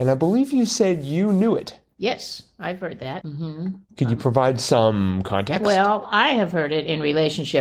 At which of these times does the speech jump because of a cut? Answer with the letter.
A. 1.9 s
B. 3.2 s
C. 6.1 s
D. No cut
B